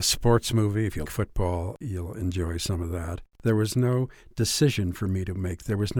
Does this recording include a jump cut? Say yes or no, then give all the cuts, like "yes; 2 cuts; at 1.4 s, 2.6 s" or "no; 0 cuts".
yes; 2 cuts; at 1.0 s, 3.3 s